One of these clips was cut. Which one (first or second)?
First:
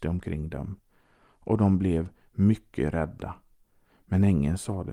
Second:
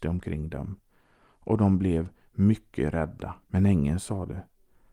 second